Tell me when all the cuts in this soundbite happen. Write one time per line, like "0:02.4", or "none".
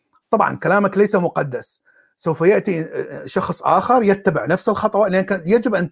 none